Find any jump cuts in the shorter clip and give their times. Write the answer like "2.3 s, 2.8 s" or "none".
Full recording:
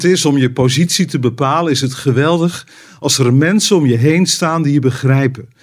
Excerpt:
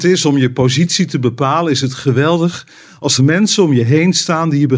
3.2 s